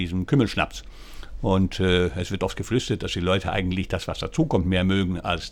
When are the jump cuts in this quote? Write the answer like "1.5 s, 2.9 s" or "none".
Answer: none